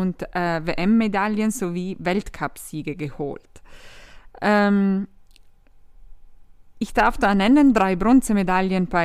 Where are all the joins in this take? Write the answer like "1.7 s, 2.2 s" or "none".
none